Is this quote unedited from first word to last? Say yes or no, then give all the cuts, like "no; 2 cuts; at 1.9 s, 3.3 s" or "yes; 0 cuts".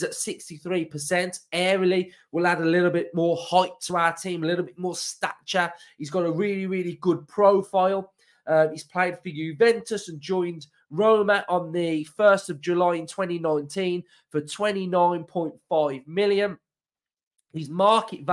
yes; 0 cuts